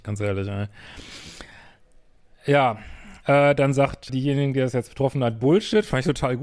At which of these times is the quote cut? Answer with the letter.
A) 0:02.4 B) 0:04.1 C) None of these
B